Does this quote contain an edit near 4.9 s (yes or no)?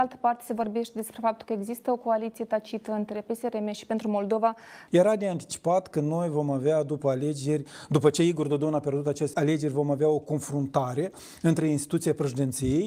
yes